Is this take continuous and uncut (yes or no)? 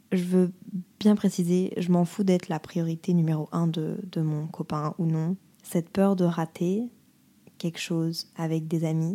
no